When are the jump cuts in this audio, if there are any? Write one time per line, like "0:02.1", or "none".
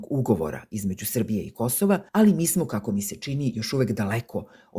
0:02.1